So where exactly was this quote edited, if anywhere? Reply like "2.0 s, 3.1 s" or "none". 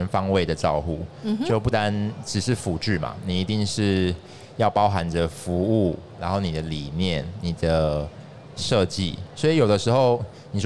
1.7 s, 9.3 s